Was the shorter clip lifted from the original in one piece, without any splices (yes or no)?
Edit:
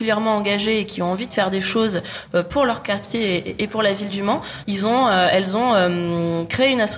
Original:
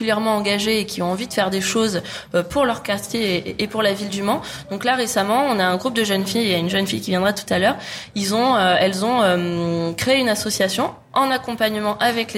no